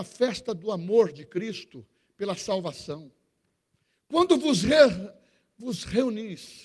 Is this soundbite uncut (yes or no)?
yes